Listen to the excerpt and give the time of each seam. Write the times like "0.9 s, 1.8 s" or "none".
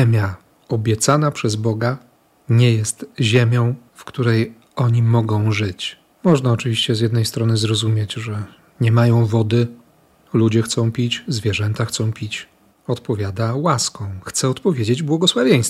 6.2 s, 12.7 s